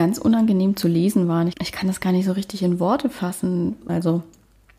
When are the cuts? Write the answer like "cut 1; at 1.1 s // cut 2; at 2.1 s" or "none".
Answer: cut 1; at 3.9 s